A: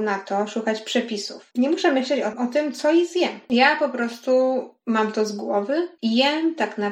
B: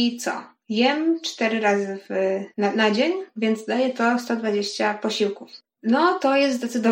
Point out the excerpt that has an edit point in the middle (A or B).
A